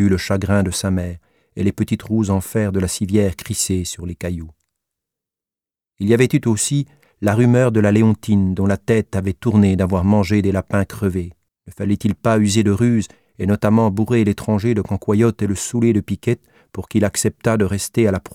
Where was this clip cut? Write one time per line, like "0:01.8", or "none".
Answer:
0:11.5